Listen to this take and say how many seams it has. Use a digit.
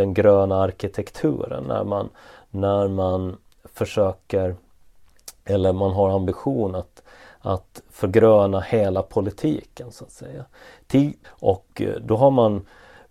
1